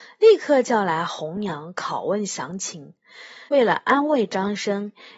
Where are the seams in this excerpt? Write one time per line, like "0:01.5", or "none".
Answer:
0:03.5